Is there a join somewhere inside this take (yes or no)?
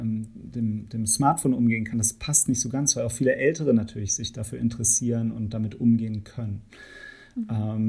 no